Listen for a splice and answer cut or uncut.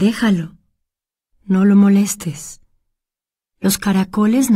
uncut